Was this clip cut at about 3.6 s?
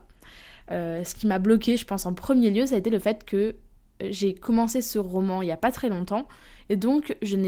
no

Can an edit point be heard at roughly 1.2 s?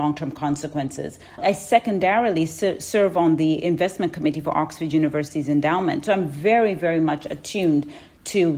no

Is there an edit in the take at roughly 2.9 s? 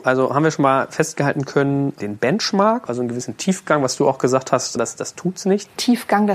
yes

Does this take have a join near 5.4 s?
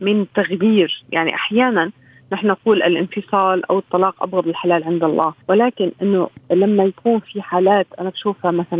yes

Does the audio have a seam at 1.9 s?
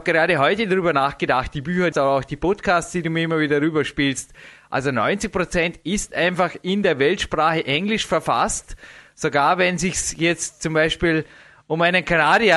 yes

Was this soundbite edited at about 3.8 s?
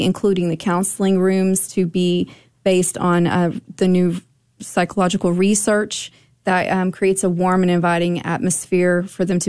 no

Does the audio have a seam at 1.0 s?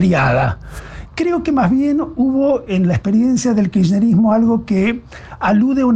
yes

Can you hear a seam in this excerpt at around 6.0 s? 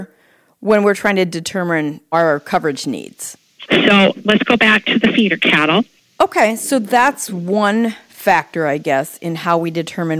yes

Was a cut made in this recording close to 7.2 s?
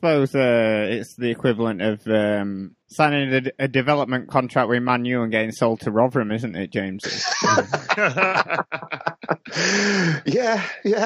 no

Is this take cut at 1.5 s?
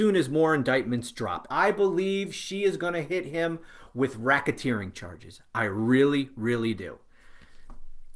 yes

